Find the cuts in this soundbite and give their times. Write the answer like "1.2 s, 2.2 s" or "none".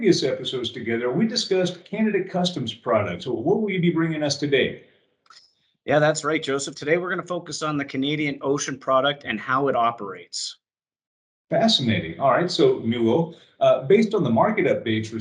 none